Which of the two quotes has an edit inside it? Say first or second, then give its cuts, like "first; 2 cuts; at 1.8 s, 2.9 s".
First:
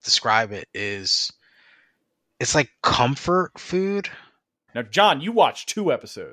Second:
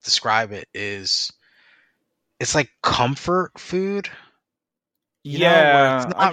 first; 1 cut; at 4.7 s